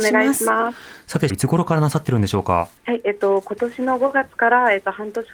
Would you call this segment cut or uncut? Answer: cut